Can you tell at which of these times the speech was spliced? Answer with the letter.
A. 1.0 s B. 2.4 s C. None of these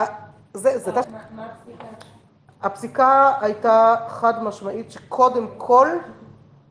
A